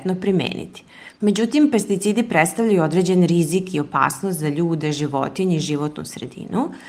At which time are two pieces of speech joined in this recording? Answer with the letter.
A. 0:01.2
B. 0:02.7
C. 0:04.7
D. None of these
A